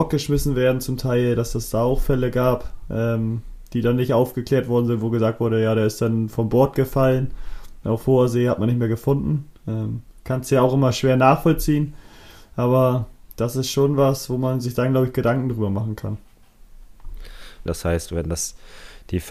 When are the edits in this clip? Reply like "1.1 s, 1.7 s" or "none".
17.7 s